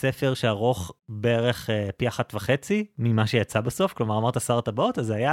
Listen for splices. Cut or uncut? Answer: cut